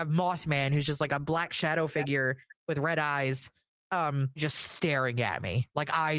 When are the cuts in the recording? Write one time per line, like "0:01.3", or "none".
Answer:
0:04.4

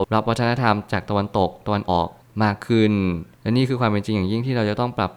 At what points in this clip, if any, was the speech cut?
0:01.9

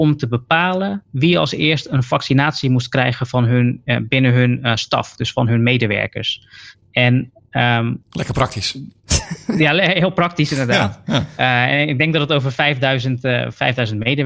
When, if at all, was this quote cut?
none

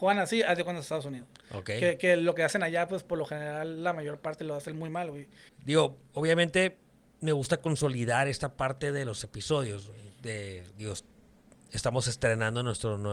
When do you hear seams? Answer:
0:05.5

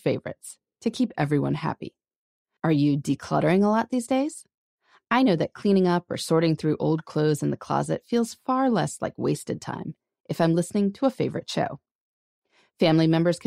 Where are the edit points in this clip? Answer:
0:02.6

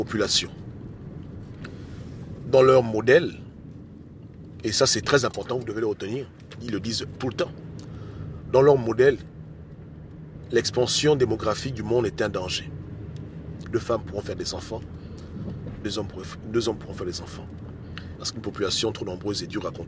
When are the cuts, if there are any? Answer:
0:06.6
0:13.6
0:18.2

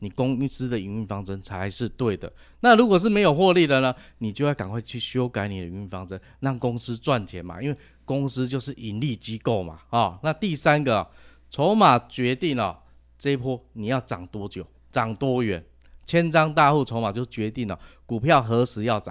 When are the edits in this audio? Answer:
none

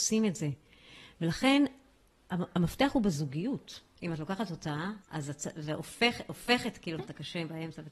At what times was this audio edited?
0:04.0
0:05.0
0:07.0

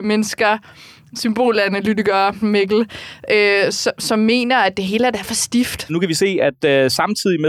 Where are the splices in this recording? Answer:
0:02.4
0:05.9

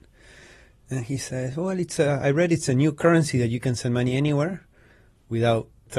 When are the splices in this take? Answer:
none

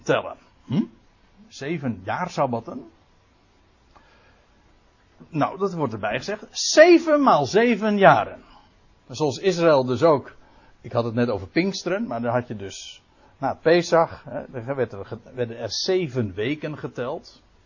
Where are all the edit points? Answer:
none

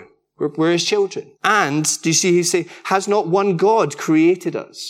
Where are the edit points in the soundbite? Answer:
0:01.4

